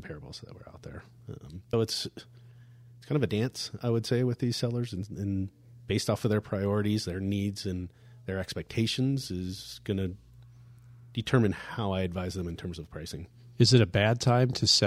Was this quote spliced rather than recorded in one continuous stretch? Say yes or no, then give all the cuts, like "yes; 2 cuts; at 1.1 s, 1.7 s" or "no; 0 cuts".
yes; 1 cut; at 1.7 s